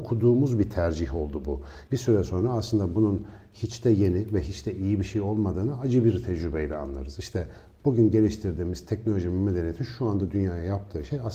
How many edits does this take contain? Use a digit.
1